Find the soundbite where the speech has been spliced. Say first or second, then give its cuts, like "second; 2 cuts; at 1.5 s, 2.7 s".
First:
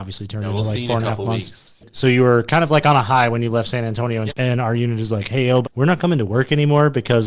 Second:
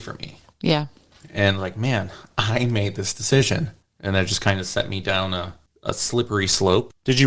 first; 2 cuts; at 4.3 s, 5.6 s